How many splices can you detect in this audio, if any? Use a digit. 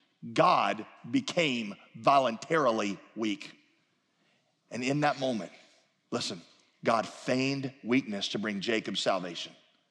0